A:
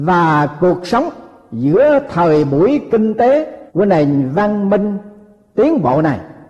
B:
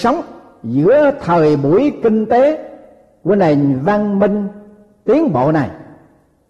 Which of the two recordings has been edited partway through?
A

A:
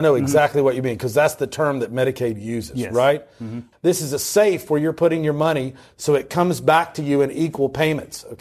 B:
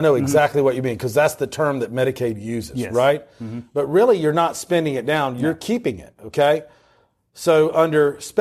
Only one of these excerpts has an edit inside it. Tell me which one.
A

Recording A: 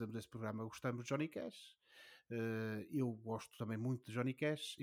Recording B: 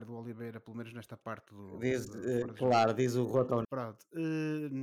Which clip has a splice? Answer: B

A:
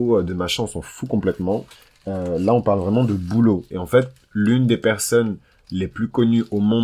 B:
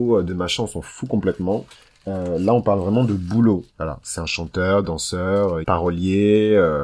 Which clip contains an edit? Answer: B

